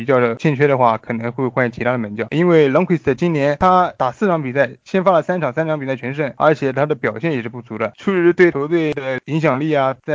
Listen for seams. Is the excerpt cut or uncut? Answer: uncut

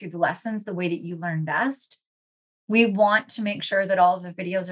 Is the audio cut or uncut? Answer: uncut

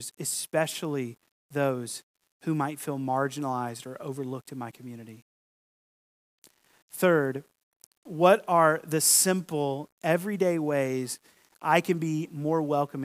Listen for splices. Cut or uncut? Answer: uncut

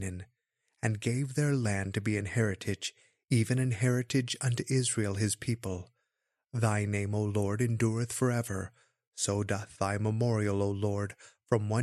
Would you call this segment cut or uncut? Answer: uncut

